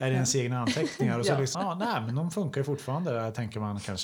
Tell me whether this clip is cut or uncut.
cut